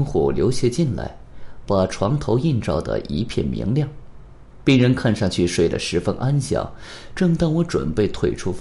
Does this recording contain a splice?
no; 0 cuts

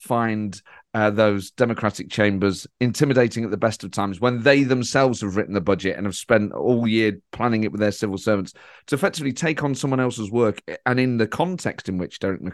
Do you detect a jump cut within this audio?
no; 0 cuts

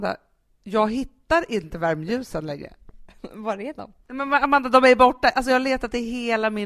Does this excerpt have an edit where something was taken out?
no; 0 cuts

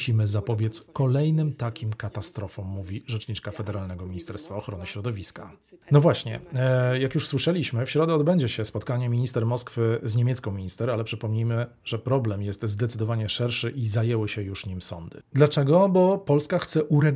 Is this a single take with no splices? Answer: no; 1 cut; at 5.8 s

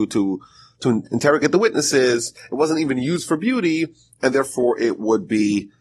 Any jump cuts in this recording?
no; 0 cuts

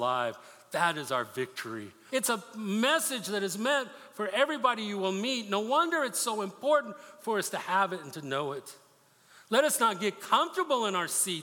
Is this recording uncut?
no; 1 cut; at 2.1 s

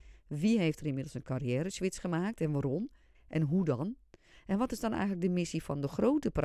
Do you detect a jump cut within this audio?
yes; 1 cut; at 3.1 s

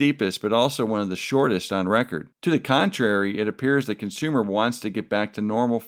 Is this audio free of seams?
no; 1 cut; at 2.4 s

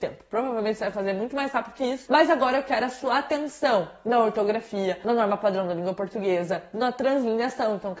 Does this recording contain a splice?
no; 0 cuts

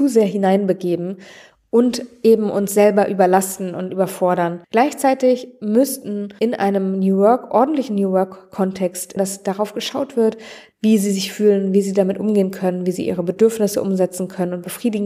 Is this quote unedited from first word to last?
no; 3 cuts; at 4.6 s, 9.2 s, 10.7 s

